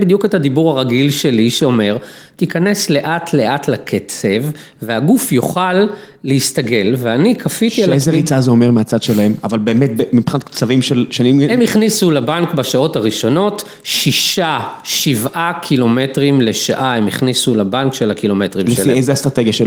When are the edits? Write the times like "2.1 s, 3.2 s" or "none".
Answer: none